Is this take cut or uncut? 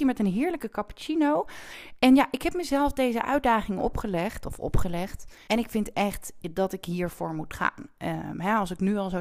cut